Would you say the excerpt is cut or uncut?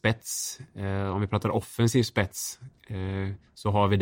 uncut